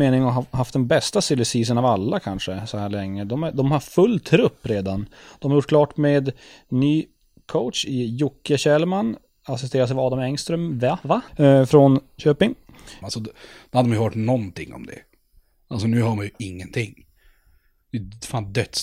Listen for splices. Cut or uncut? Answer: cut